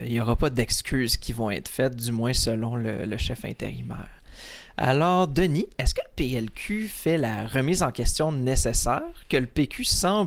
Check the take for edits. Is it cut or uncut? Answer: uncut